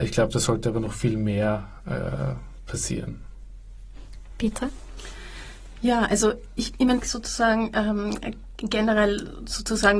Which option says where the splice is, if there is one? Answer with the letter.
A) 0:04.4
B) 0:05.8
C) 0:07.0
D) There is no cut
C